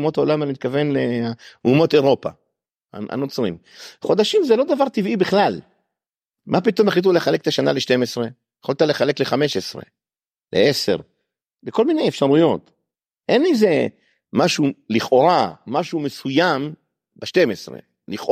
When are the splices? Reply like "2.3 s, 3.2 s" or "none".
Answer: none